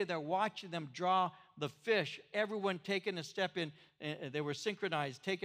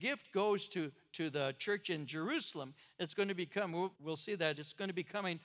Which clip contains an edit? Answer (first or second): second